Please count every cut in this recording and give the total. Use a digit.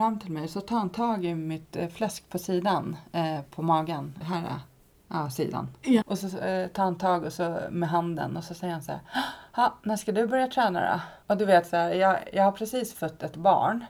3